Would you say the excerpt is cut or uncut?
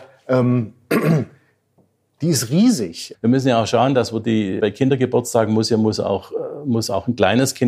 cut